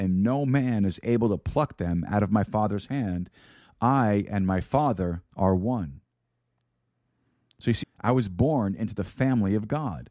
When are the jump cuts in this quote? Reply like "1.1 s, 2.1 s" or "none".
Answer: 5.3 s, 7.8 s